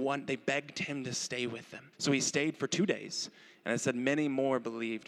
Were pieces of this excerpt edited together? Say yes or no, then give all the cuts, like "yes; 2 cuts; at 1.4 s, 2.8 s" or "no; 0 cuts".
yes; 1 cut; at 1.9 s